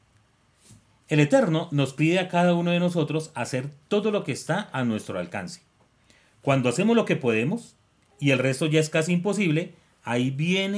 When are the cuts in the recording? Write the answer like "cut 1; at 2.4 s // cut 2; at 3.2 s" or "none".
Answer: none